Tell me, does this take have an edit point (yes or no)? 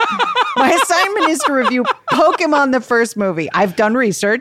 no